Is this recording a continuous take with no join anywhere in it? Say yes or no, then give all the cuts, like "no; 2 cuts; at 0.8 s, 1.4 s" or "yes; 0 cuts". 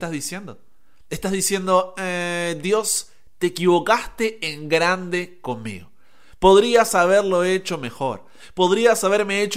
yes; 0 cuts